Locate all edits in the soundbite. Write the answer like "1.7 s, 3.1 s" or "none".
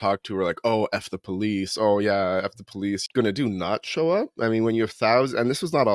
3.1 s